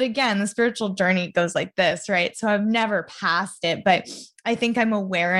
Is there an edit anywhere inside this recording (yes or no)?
no